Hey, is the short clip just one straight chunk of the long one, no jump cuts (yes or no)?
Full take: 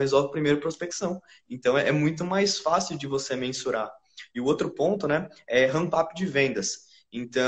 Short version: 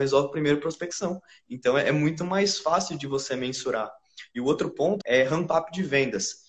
no